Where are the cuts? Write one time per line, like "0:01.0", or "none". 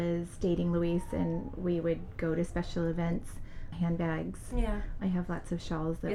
0:03.7
0:05.0